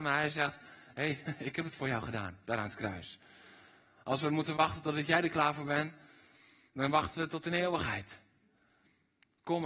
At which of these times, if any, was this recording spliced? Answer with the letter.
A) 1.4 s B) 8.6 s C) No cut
C